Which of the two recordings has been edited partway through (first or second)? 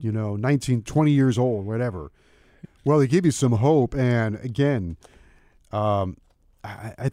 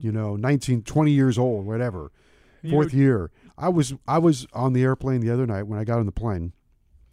first